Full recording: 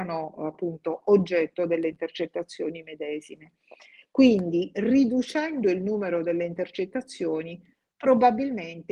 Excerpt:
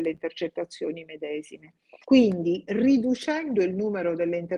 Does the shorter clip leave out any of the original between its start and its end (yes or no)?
yes